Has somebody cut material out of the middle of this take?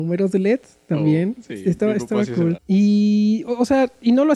yes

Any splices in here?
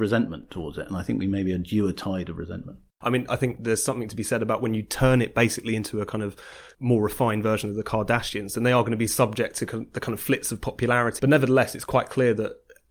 yes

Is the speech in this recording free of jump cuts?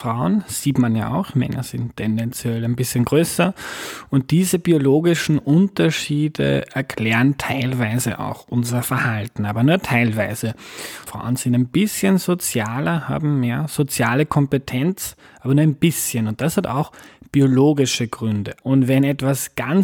no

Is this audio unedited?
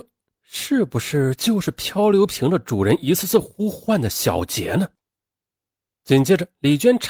yes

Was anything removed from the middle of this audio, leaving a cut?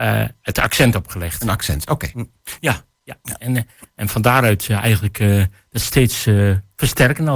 yes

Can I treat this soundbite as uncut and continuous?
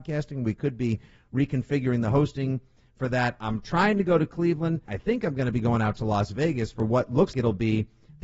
no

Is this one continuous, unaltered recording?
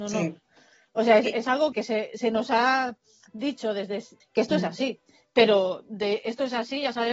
no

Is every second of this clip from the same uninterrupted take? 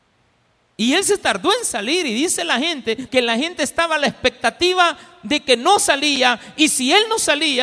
no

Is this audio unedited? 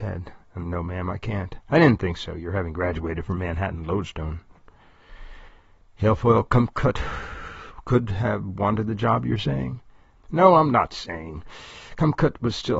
yes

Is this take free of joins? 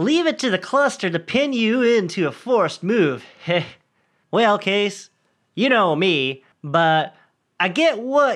no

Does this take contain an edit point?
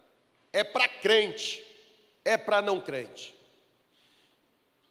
yes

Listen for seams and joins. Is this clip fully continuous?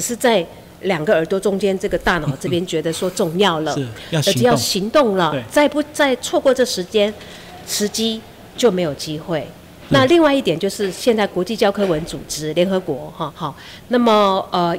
no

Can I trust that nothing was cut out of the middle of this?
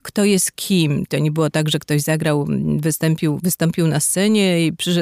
no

